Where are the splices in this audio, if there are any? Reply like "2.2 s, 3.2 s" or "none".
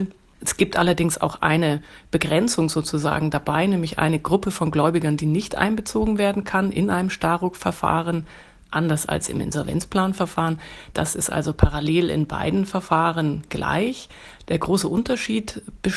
10.9 s